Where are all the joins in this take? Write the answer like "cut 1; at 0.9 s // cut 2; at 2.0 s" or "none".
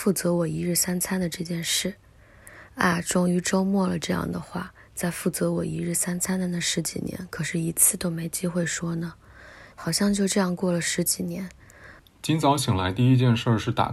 cut 1; at 9.7 s // cut 2; at 12.0 s

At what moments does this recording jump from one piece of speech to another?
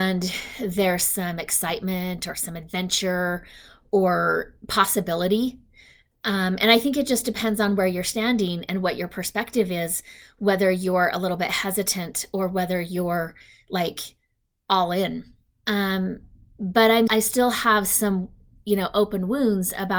cut 1; at 15.5 s // cut 2; at 17.1 s

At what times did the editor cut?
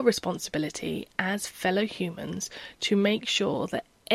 none

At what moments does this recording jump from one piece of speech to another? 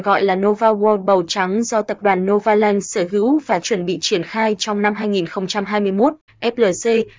cut 1; at 6.3 s

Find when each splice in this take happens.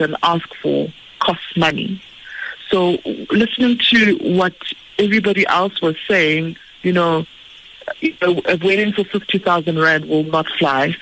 none

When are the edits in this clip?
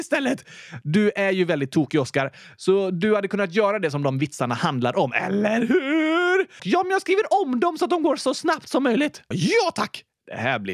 cut 1; at 6.6 s // cut 2; at 9.3 s

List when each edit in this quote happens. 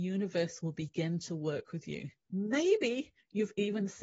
cut 1; at 2.2 s

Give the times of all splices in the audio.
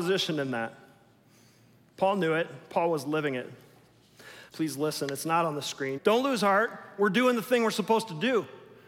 cut 1; at 4.5 s // cut 2; at 6.0 s

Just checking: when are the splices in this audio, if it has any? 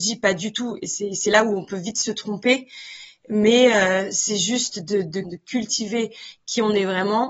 cut 1; at 5.2 s

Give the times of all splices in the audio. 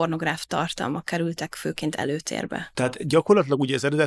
cut 1; at 2.7 s

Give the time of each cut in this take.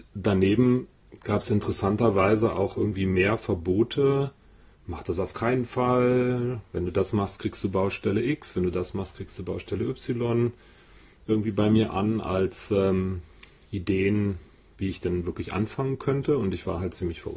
none

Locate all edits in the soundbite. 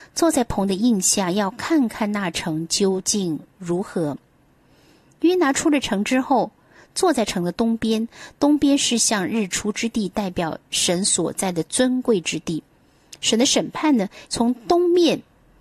cut 1; at 14.3 s

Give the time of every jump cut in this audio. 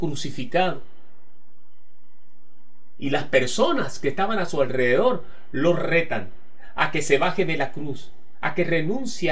none

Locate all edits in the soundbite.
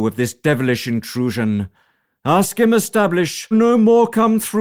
cut 1; at 3.5 s

